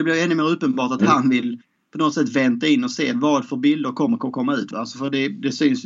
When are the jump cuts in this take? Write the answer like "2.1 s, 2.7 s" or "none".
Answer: 4.7 s